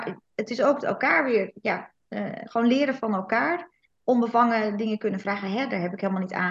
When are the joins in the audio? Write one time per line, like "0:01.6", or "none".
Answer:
none